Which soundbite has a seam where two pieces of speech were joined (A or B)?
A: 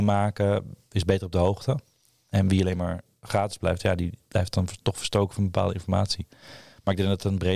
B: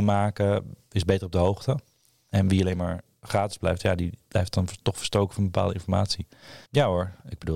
B